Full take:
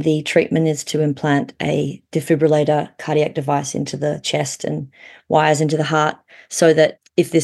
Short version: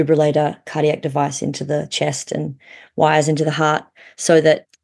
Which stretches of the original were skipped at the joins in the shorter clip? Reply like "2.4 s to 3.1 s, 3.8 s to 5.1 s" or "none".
none